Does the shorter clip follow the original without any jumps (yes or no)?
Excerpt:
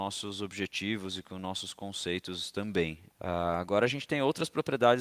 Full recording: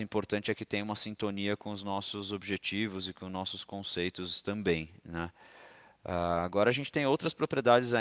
no